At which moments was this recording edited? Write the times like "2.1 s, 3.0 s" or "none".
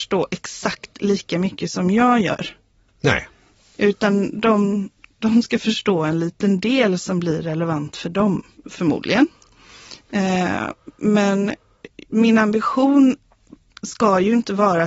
8.6 s